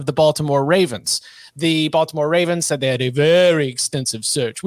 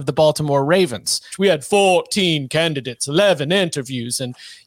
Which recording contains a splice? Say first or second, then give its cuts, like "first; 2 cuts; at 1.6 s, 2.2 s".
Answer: second; 1 cut; at 1.3 s